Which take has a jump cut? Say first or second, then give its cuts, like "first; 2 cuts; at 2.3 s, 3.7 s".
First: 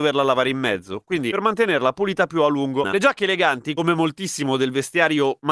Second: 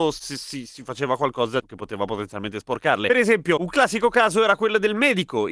first; 1 cut; at 2.8 s